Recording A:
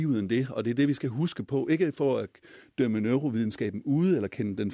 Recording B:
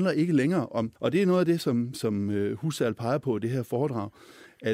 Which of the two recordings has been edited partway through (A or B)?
B